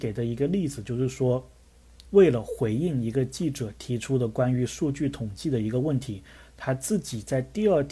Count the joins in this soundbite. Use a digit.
1